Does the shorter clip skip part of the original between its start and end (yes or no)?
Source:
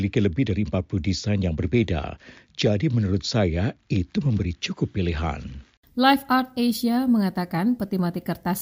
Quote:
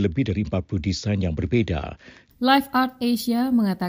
yes